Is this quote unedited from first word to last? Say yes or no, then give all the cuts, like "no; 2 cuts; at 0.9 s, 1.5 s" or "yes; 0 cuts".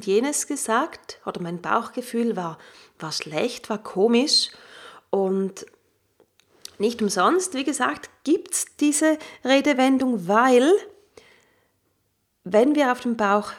yes; 0 cuts